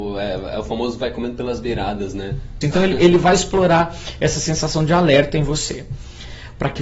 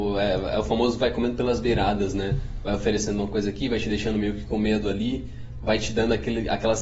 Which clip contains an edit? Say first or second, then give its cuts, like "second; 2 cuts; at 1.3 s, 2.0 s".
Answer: first; 1 cut; at 2.6 s